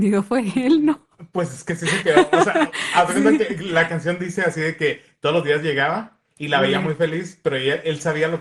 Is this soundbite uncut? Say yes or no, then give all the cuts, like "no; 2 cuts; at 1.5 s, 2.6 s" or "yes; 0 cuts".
yes; 0 cuts